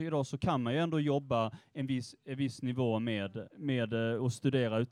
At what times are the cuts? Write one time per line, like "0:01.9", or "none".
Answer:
0:03.5